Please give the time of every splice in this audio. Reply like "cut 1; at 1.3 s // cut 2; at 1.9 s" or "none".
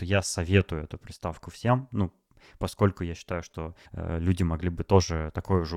cut 1; at 3.8 s

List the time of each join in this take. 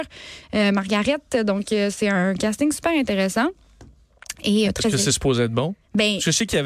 cut 1; at 4.6 s

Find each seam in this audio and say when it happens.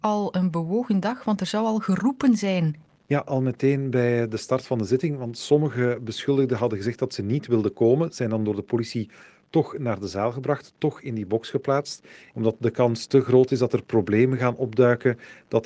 cut 1; at 12.3 s

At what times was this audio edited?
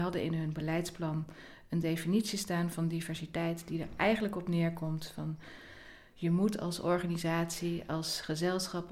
none

